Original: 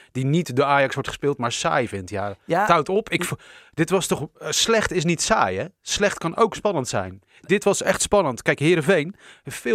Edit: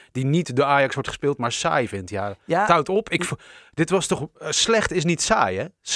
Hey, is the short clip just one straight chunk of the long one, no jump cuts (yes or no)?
yes